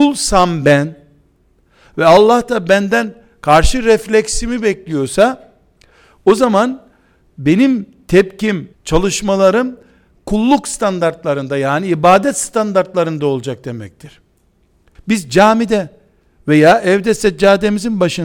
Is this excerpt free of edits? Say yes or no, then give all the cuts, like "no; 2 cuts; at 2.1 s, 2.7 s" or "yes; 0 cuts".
no; 2 cuts; at 8.7 s, 15.0 s